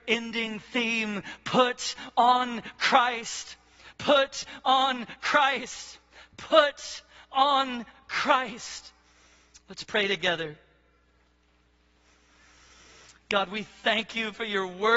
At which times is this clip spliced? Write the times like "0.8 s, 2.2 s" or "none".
none